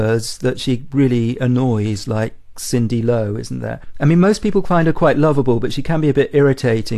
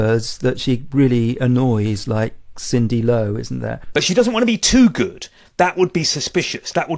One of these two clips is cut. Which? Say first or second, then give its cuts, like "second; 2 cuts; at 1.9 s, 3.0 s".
second; 2 cuts; at 3.9 s, 5.5 s